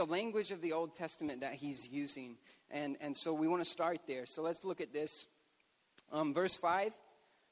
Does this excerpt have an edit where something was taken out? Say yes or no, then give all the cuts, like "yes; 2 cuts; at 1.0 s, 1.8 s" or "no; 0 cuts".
no; 0 cuts